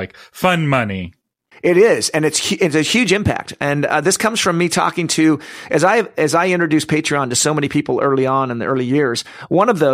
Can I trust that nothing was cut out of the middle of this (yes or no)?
yes